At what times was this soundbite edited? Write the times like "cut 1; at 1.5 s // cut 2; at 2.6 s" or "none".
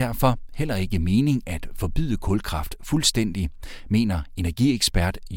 none